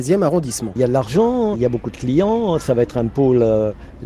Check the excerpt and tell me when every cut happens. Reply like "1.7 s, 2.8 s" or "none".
1.5 s